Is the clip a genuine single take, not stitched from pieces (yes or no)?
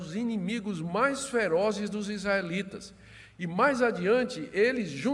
yes